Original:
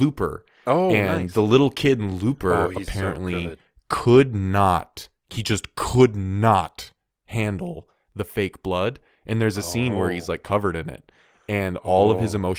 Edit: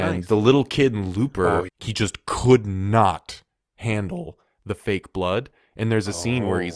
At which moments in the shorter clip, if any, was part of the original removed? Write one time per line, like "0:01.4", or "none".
0:01.7